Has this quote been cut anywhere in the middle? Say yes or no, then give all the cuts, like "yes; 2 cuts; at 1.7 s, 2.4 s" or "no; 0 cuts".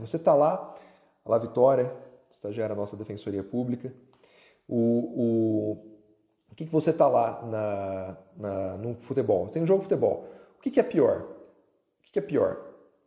no; 0 cuts